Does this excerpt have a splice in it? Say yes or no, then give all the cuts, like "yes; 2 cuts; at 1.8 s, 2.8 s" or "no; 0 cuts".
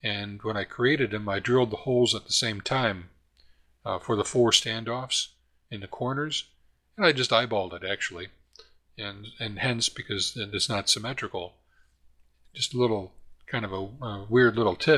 no; 0 cuts